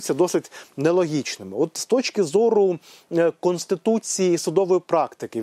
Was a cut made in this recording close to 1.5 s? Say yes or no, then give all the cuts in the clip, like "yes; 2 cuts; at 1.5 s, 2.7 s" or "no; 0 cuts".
no; 0 cuts